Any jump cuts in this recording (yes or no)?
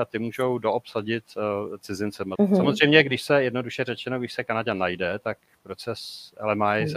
yes